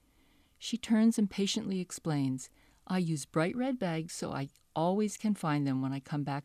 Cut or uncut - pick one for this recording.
uncut